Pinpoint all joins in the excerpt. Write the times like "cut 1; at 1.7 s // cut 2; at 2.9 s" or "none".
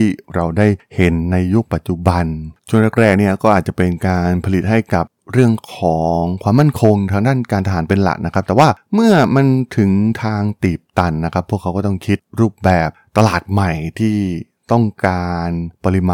cut 1; at 2.6 s